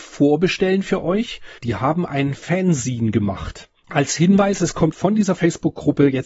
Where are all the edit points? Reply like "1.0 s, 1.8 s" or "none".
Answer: 1.6 s, 3.8 s, 4.9 s